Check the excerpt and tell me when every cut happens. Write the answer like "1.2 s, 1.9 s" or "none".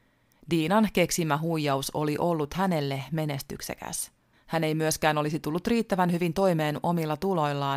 4.3 s